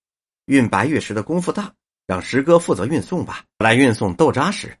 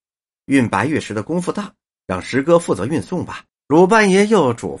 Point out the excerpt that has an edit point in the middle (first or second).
second